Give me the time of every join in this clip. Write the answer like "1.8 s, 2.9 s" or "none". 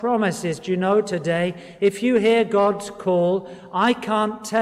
none